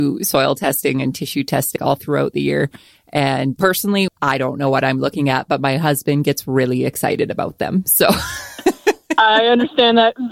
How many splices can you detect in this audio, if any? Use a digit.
1